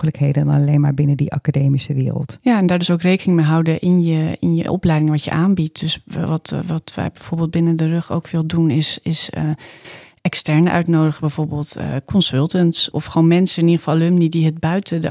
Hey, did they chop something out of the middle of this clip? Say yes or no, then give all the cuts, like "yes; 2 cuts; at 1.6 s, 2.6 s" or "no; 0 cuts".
yes; 1 cut; at 12.9 s